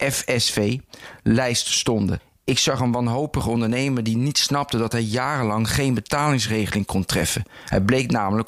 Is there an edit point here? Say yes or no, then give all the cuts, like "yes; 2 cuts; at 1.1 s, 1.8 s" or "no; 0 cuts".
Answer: no; 0 cuts